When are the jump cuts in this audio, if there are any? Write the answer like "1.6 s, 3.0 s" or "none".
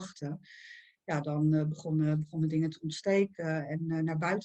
none